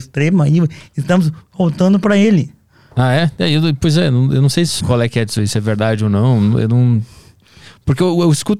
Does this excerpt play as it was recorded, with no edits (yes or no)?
no